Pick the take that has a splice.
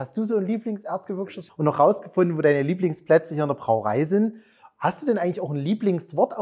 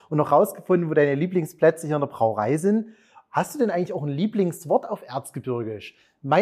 first; 1 cut; at 1.5 s

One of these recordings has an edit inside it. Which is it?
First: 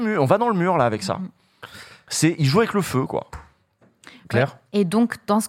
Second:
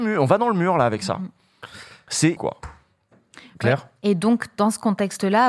second; 1 cut; at 2.4 s

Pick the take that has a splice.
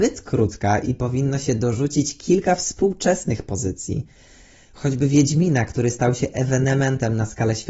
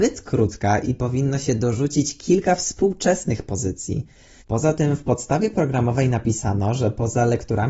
second; 1 cut; at 4.4 s

